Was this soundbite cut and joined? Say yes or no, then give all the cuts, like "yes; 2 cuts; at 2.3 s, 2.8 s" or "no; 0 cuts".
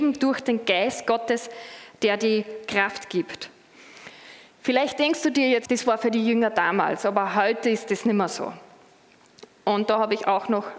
yes; 1 cut; at 5.7 s